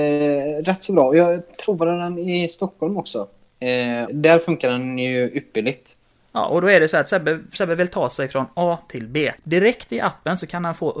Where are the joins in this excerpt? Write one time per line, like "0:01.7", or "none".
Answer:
0:04.1
0:09.4